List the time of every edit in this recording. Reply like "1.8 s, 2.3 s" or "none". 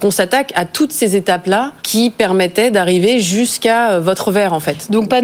1.8 s